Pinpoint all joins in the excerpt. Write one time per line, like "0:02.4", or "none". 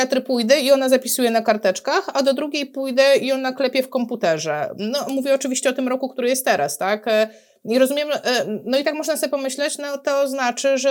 none